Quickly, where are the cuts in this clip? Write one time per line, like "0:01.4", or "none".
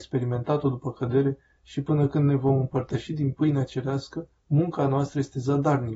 0:04.4